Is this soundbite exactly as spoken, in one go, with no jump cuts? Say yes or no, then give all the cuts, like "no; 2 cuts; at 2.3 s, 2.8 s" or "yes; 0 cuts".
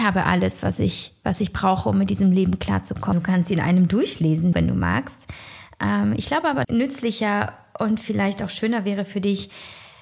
no; 3 cuts; at 3.1 s, 4.5 s, 6.6 s